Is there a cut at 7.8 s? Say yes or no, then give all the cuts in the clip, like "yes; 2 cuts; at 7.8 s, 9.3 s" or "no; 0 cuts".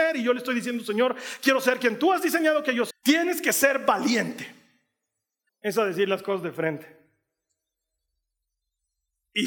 no; 2 cuts; at 2.9 s, 5.5 s